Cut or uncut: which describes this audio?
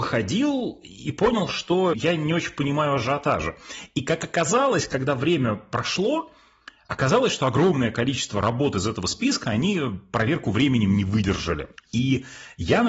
cut